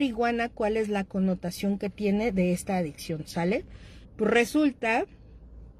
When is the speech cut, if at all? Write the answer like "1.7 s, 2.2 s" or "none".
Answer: 4.0 s